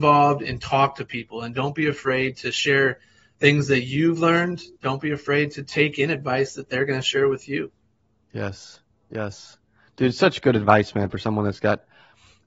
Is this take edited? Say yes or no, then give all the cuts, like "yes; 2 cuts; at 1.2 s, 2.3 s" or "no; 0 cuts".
no; 0 cuts